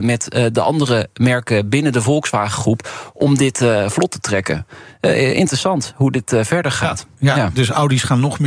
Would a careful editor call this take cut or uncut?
uncut